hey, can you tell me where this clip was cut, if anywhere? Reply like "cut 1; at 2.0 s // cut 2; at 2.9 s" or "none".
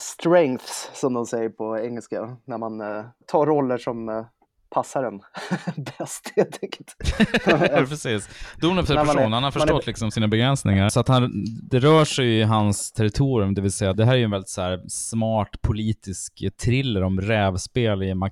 cut 1; at 10.9 s // cut 2; at 13.9 s